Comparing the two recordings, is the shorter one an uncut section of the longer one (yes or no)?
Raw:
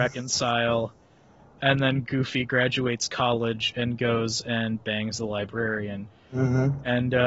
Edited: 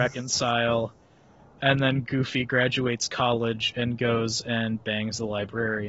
yes